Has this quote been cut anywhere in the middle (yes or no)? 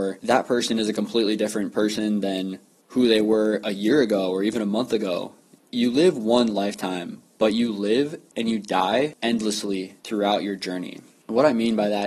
yes